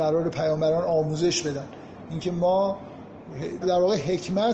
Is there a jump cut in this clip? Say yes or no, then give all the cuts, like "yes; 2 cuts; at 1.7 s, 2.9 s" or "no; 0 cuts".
yes; 1 cut; at 3.6 s